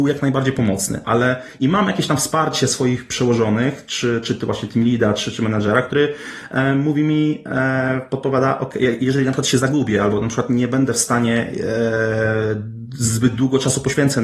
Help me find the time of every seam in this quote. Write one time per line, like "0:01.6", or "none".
none